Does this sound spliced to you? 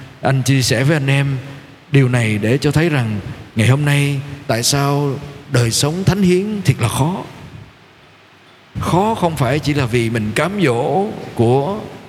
no; 0 cuts

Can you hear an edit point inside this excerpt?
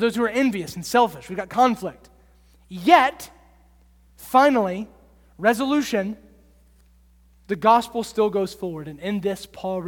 no; 0 cuts

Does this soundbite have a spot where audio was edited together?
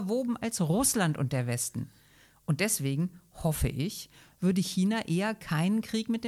no; 0 cuts

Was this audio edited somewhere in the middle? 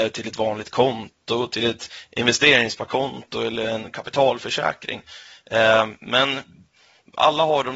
no; 0 cuts

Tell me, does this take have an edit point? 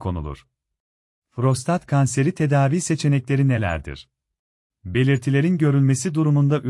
yes; 2 cuts; at 1.2 s, 4.7 s

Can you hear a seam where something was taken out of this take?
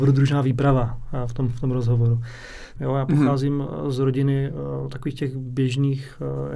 yes; 1 cut; at 2.8 s

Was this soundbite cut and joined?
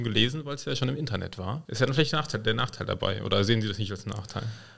yes; 1 cut; at 1.7 s

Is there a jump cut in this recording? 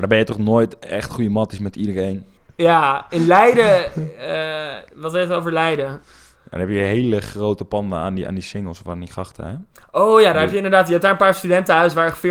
yes; 1 cut; at 2.4 s

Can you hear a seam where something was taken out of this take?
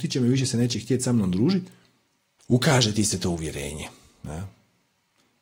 yes; 1 cut; at 2.4 s

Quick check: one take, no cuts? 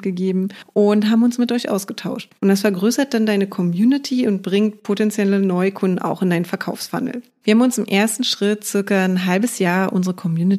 no; 2 cuts; at 2.4 s, 7.4 s

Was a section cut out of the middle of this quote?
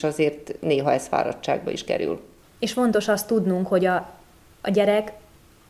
yes; 1 cut; at 2.4 s

